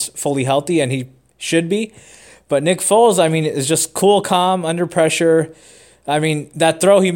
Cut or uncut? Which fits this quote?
uncut